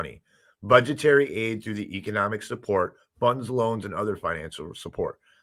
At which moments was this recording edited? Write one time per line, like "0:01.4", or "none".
none